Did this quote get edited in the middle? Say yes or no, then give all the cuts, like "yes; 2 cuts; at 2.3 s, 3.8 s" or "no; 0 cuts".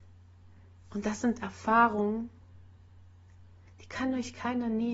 no; 0 cuts